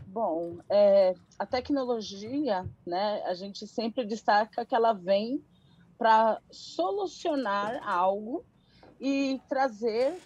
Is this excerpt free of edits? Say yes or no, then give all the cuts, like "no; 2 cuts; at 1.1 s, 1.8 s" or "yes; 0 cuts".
yes; 0 cuts